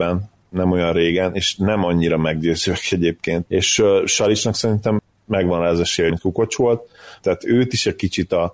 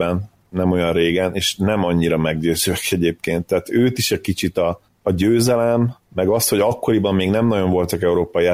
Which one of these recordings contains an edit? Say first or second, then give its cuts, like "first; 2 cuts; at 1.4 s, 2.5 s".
first; 3 cuts; at 3.5 s, 6.1 s, 7.2 s